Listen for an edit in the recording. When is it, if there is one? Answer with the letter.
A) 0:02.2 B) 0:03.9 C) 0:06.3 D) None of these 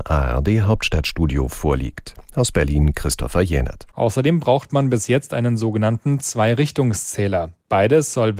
B